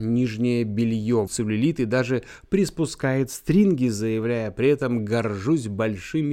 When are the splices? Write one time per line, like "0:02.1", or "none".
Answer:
0:01.3

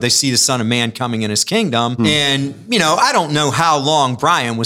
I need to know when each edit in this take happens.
0:02.0

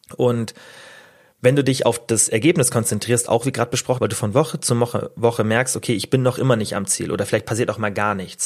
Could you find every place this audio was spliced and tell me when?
0:04.0

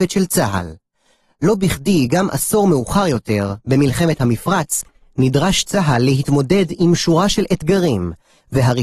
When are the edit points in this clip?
none

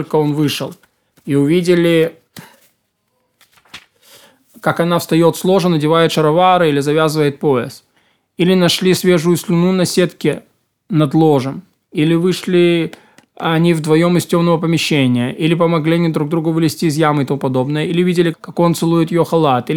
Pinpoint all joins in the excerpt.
0:18.3

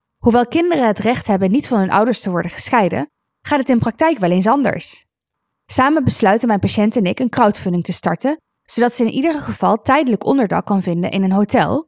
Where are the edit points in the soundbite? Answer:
none

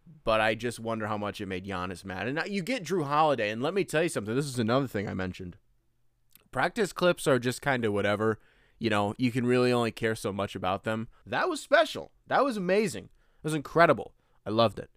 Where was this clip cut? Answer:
0:11.2

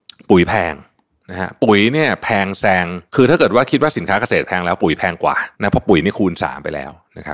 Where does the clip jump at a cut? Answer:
0:03.1
0:05.5

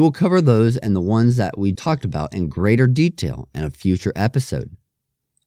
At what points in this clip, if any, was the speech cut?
0:01.7

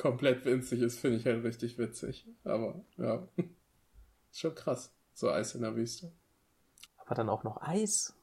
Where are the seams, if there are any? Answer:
0:06.9

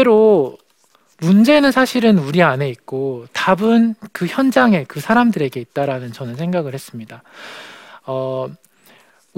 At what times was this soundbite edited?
none

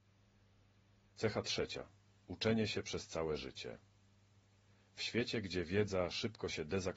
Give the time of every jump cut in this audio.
0:02.2

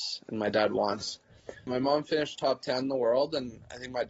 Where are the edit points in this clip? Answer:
0:01.7

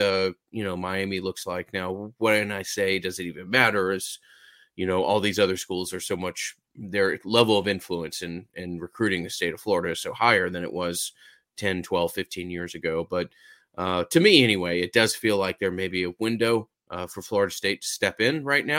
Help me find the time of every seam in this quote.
none

